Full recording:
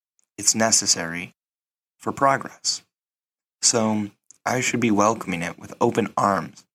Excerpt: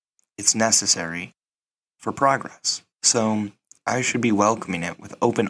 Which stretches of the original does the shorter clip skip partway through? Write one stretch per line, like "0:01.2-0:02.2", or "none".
0:02.9-0:03.5